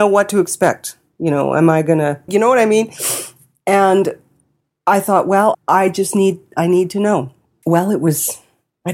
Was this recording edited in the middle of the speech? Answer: yes; 3 cuts; at 2.3 s, 5.5 s, 7.6 s

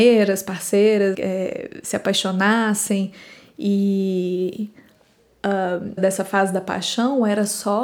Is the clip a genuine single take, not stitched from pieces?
no; 2 cuts; at 1.1 s, 6.0 s

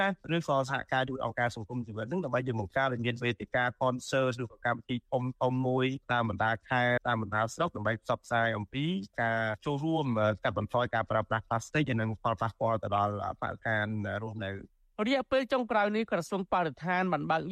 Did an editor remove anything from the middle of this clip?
yes; 1 cut; at 7.0 s

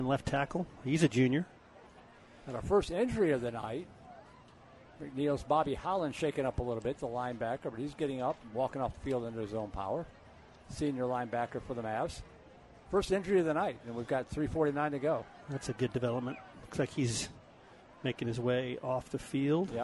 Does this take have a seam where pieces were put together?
no; 0 cuts

